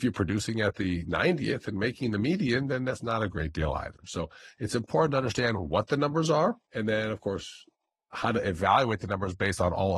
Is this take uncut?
no; 1 cut; at 6.6 s

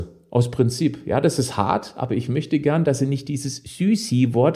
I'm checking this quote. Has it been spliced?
no; 0 cuts

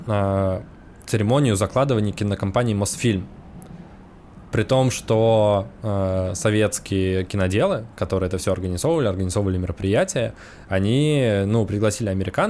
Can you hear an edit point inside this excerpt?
no; 0 cuts

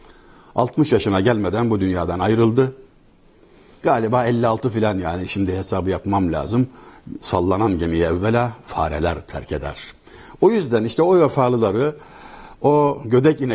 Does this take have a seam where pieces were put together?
yes; 1 cut; at 7.2 s

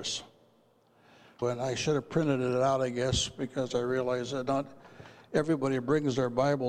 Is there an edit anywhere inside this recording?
yes; 1 cut; at 1.4 s

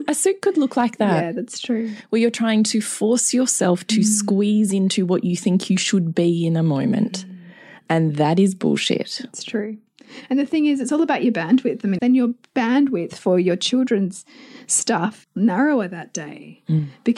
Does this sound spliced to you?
yes; 2 cuts; at 12.0 s, 15.2 s

